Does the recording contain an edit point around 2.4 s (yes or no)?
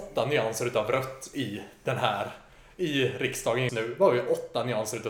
no